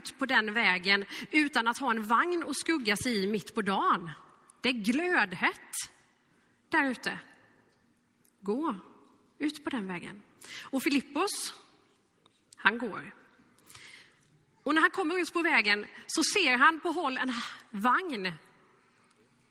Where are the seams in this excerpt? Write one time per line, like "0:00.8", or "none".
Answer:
none